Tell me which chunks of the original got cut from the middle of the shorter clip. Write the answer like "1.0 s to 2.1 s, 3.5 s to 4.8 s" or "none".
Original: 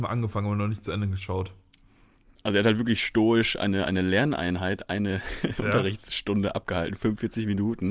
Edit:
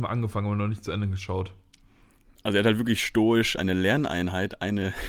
3.6 s to 3.9 s